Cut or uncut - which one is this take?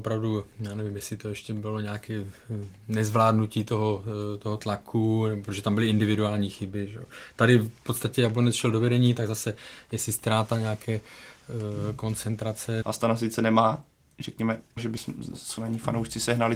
cut